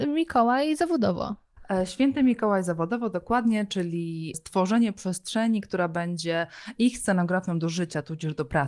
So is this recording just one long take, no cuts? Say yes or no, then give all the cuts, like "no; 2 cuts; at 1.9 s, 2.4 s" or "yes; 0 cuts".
no; 1 cut; at 4.3 s